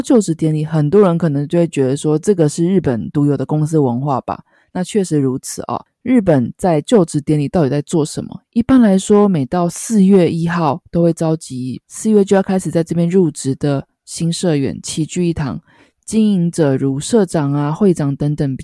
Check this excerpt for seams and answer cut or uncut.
uncut